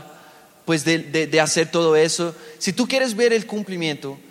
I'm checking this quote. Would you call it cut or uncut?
uncut